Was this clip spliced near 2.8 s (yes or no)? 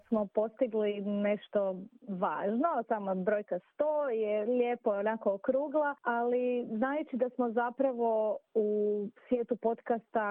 no